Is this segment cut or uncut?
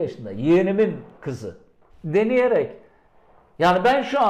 cut